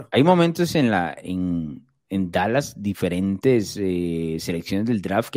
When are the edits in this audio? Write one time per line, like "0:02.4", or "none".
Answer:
none